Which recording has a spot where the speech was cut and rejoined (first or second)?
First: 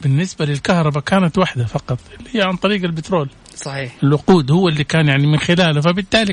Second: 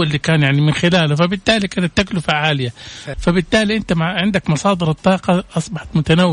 second